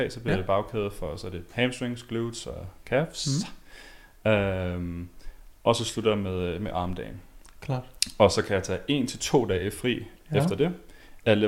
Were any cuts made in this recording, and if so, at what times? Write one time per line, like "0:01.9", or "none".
none